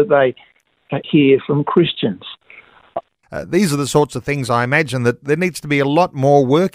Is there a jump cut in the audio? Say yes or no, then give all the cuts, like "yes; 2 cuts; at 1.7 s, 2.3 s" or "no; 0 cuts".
yes; 2 cuts; at 1.0 s, 3.2 s